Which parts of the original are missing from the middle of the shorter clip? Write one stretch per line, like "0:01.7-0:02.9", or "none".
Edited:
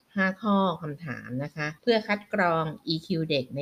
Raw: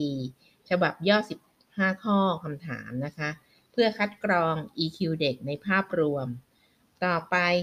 0:03.4-0:03.7